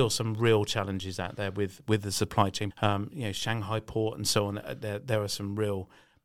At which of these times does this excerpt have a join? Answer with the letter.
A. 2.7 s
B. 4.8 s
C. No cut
A